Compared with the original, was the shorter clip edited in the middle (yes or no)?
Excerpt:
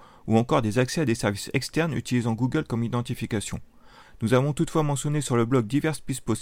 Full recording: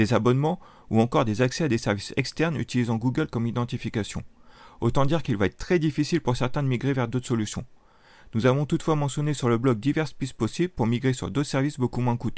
yes